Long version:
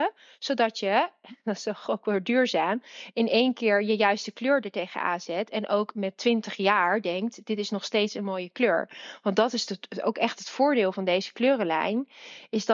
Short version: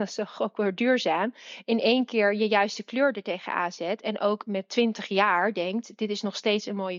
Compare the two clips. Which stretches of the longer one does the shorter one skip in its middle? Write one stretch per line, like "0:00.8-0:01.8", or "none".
none

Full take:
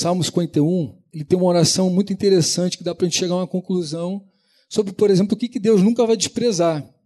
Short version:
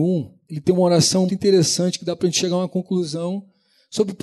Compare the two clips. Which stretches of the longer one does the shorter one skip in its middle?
0:01.9-0:02.1

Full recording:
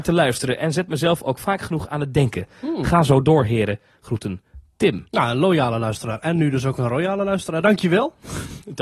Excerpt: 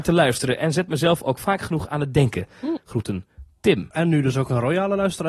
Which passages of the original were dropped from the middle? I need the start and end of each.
0:02.8-0:03.9
0:05.1-0:06.2

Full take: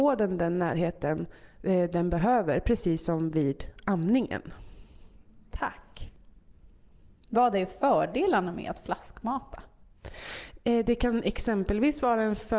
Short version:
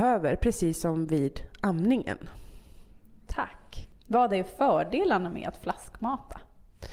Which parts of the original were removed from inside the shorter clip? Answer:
0:06.2-0:07.2

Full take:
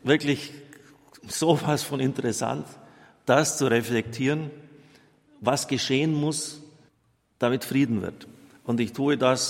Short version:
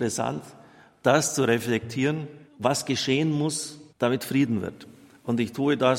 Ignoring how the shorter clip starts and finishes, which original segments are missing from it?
0:04.7-0:05.3
0:06.7-0:07.3

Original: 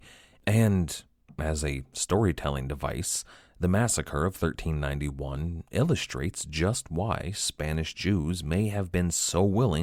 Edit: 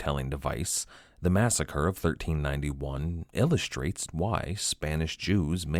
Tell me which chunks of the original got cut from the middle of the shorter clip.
0:06.4-0:06.8

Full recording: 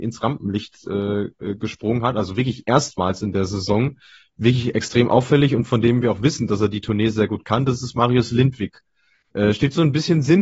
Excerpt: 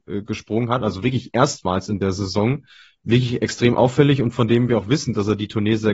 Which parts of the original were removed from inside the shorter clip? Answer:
none

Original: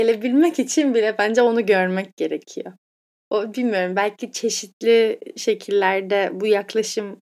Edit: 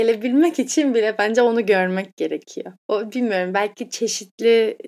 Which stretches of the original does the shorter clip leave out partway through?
0:02.8-0:03.2

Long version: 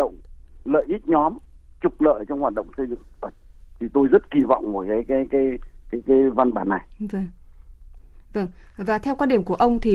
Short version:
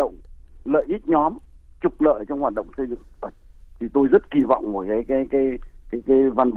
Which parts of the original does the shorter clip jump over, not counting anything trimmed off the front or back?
none

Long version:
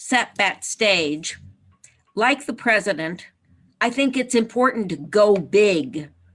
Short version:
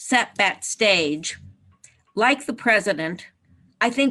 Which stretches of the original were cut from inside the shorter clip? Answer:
none

